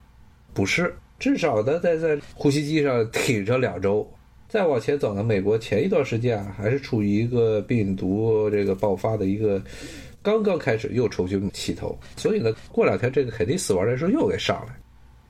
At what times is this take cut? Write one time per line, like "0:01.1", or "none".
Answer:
0:01.2